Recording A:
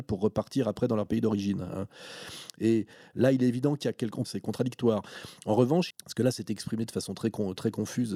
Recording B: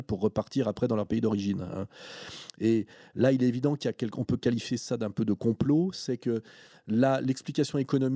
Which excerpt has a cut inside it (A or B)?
A